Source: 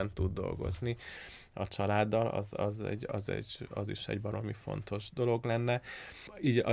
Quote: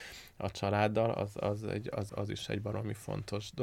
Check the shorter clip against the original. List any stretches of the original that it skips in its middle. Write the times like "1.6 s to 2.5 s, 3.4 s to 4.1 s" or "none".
3.3 s to 3.7 s

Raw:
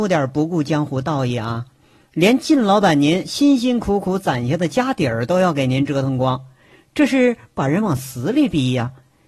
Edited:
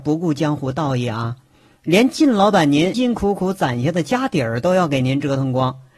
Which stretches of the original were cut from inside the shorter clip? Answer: 3.2 s to 3.6 s

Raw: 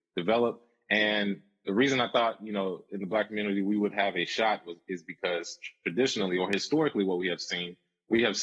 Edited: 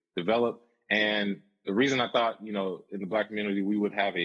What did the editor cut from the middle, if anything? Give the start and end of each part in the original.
none

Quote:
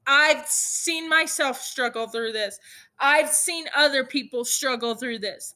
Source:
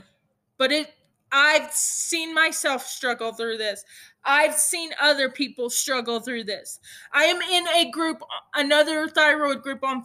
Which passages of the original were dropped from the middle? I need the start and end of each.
none

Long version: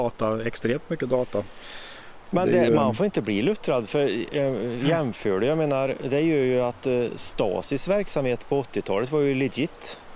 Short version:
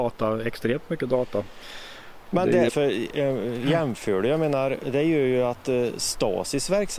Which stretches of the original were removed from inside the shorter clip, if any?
2.7 s to 3.9 s

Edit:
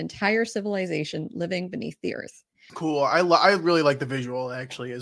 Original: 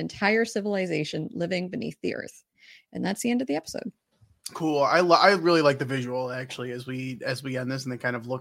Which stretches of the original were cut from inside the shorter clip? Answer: 2.7 s to 4.5 s

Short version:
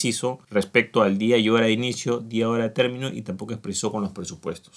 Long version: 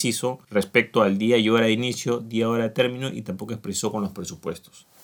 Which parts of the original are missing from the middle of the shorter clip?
none

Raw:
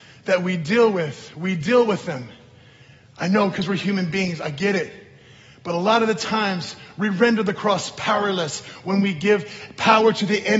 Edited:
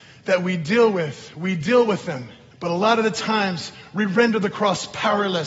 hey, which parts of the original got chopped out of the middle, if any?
2.5 s to 5.5 s

